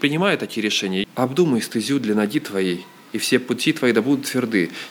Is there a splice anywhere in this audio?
yes; 1 cut; at 1.0 s

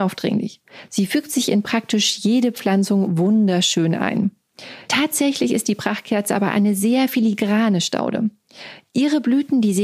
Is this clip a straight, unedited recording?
no; 1 cut; at 4.9 s

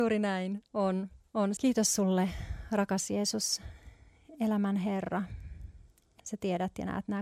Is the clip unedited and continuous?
no; 2 cuts; at 1.6 s, 6.2 s

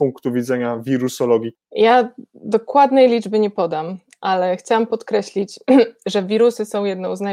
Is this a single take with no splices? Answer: no; 1 cut; at 1.5 s

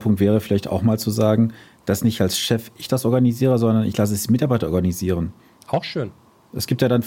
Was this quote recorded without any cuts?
yes; 0 cuts

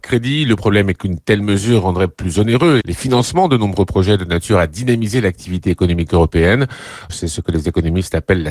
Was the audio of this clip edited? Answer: yes; 2 cuts; at 2.8 s, 7.1 s

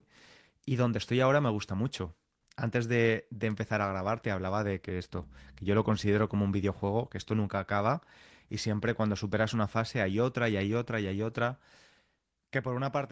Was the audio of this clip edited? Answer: no; 0 cuts

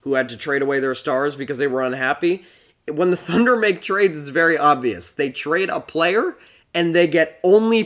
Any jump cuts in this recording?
no; 0 cuts

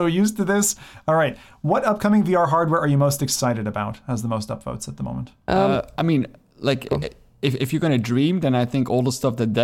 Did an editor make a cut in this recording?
no; 0 cuts

